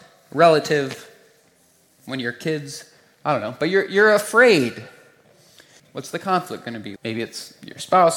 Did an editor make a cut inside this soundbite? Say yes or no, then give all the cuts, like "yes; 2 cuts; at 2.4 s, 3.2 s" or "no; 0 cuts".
yes; 2 cuts; at 5.8 s, 7.0 s